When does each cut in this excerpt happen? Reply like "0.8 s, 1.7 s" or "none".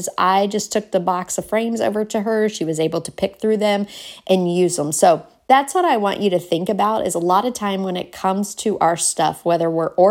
none